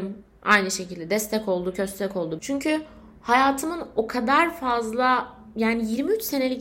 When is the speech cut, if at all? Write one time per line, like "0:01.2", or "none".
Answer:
0:02.4